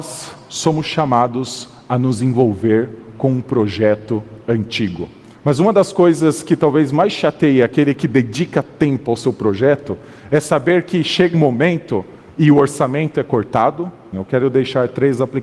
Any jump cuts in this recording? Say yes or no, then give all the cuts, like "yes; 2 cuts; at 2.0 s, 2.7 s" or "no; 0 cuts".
yes; 3 cuts; at 5.3 s, 11.3 s, 14.1 s